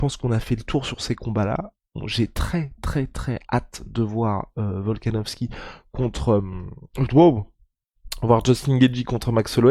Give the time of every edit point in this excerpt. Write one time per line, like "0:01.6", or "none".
none